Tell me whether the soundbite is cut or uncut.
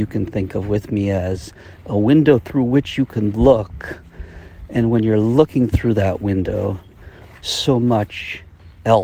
uncut